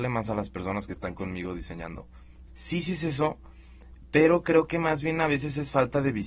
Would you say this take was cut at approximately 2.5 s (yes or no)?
yes